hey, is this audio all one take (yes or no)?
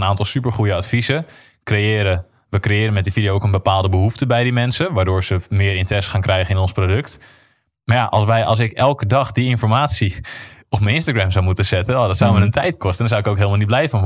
yes